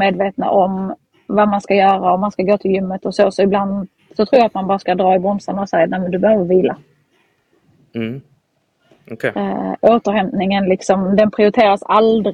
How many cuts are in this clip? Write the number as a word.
zero